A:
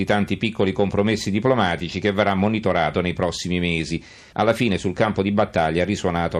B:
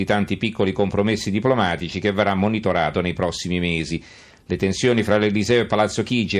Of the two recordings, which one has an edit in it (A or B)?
A